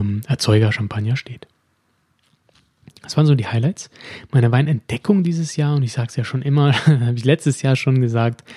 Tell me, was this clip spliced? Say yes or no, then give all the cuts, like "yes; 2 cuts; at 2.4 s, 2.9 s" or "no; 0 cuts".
no; 0 cuts